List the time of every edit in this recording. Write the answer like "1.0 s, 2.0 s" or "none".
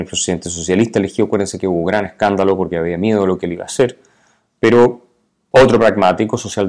5.5 s